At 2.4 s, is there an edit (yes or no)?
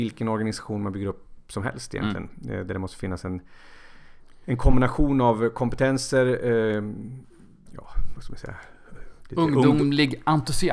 no